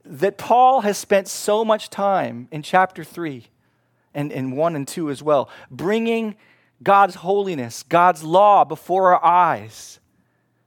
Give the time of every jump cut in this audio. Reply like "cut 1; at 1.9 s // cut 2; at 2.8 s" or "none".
none